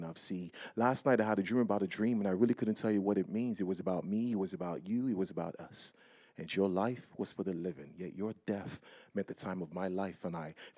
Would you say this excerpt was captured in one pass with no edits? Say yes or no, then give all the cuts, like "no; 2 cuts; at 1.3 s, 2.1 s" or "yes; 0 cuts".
yes; 0 cuts